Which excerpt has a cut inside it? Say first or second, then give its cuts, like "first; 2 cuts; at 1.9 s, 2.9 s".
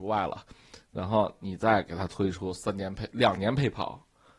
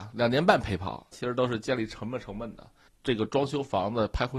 second; 2 cuts; at 1.1 s, 2.9 s